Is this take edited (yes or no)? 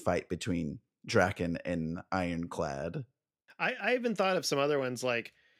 no